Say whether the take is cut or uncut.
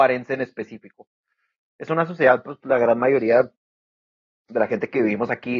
uncut